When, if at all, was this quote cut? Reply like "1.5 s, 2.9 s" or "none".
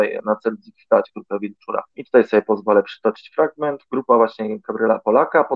1.9 s